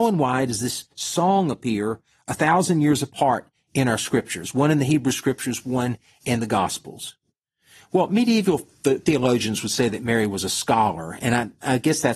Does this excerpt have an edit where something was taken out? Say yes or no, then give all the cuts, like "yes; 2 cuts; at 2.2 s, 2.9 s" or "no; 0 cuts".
no; 0 cuts